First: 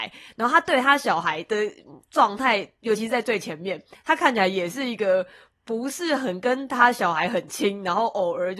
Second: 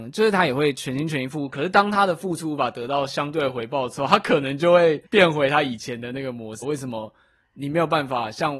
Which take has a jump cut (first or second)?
second